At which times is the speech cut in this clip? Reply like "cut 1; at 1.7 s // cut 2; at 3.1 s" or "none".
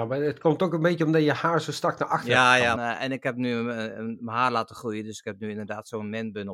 cut 1; at 2.8 s